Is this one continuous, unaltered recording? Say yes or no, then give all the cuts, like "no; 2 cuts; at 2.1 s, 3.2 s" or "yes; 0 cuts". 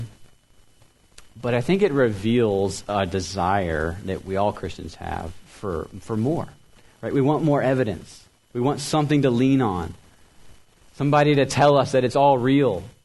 yes; 0 cuts